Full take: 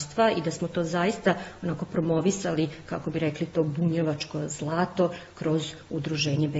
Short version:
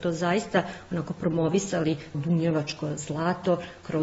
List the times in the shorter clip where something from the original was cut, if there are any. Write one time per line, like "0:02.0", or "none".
0:02.1